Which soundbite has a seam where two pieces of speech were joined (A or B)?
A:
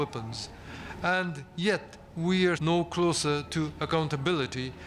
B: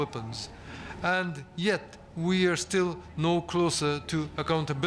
A